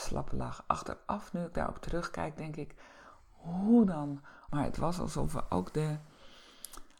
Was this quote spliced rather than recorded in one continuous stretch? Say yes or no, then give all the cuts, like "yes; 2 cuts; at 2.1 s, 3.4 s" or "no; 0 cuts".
yes; 1 cut; at 4.5 s